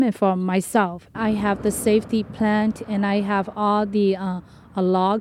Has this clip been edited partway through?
yes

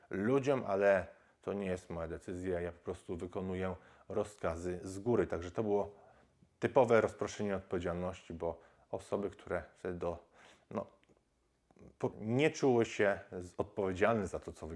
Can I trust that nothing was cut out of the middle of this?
no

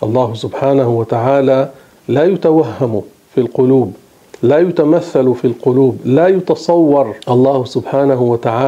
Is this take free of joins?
no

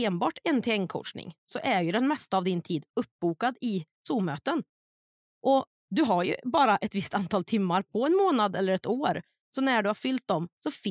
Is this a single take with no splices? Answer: yes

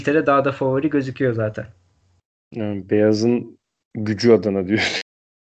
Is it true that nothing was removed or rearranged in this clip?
yes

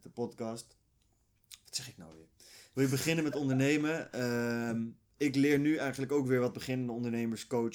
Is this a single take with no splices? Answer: yes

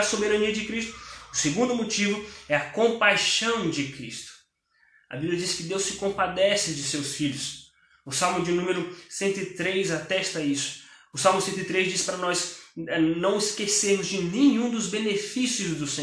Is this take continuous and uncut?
yes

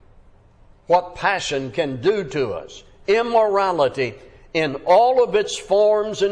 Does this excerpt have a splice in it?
no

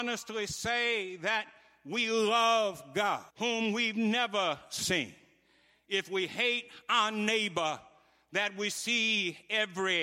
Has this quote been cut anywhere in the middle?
yes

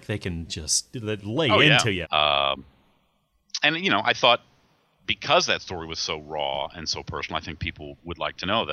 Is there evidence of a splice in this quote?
yes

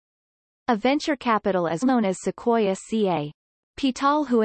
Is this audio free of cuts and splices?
no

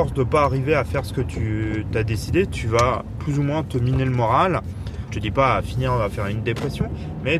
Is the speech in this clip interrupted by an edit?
yes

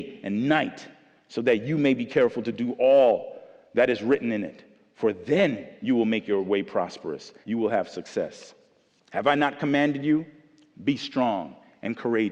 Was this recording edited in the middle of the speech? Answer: yes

